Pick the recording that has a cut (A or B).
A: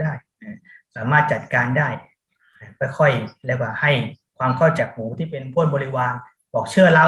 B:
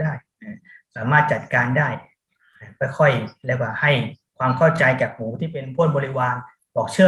A